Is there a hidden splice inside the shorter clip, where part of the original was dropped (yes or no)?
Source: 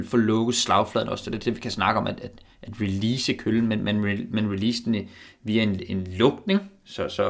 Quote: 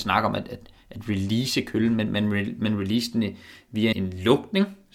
yes